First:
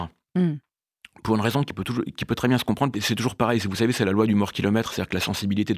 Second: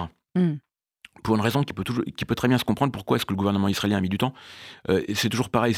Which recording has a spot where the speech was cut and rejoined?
first; 1 cut; at 2.9 s

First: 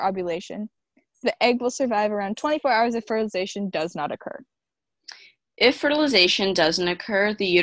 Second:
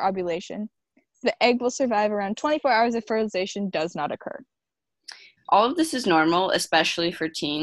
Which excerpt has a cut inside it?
second; 1 cut; at 5.4 s

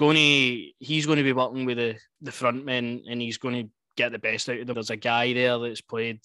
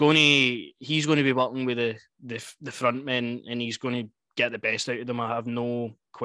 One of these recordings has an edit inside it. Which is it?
first; 2 cuts; at 2.2 s, 4.7 s

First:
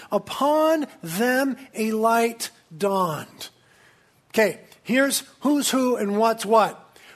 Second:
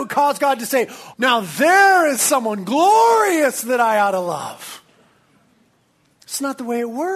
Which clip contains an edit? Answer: second; 1 cut; at 1.1 s

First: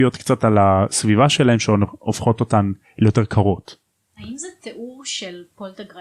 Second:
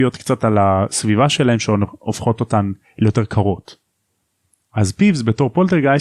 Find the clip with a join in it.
first; 1 cut; at 4.1 s

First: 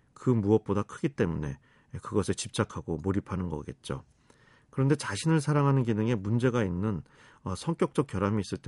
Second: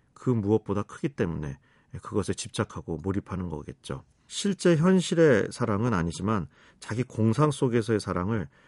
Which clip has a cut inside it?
second; 1 cut; at 4.3 s

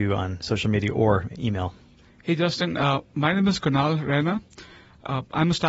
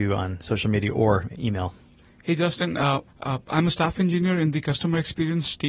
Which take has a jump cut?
second; 1 cut; at 3.1 s

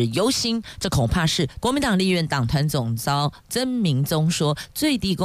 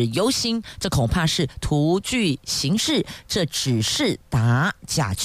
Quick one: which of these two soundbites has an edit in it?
first; 1 cut; at 1.6 s

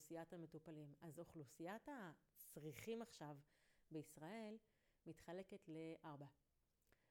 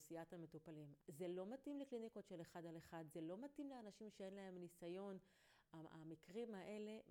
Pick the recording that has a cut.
second; 1 cut; at 1.0 s

